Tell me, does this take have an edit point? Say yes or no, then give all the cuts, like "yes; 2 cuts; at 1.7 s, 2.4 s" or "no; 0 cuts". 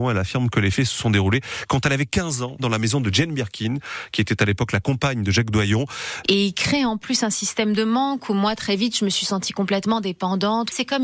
yes; 2 cuts; at 2.6 s, 6.2 s